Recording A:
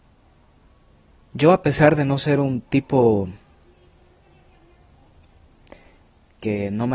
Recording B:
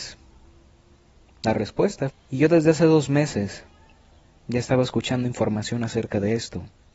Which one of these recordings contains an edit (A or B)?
B